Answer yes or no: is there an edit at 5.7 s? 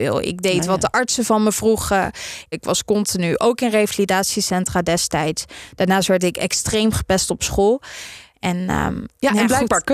no